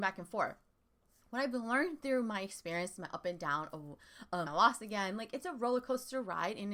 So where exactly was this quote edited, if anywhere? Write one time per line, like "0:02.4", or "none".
0:04.5

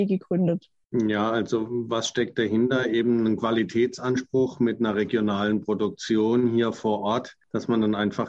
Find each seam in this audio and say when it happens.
none

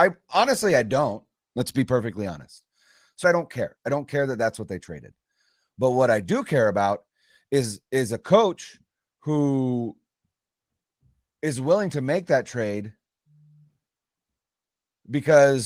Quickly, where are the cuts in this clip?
0:01.4
0:03.2

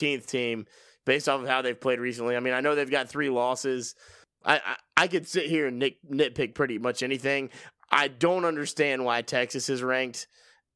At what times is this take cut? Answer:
0:04.4

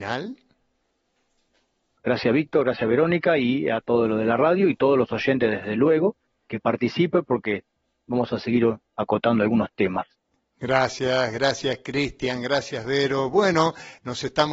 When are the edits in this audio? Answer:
0:02.0

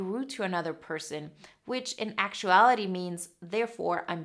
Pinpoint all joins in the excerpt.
none

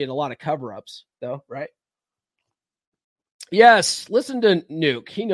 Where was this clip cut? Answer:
none

